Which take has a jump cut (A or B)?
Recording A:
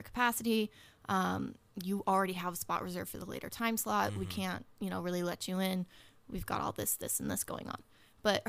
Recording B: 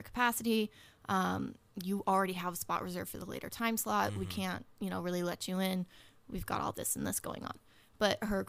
B